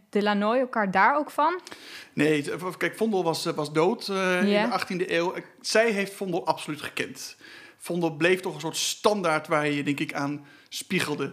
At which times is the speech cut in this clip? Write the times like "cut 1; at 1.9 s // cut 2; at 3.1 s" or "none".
none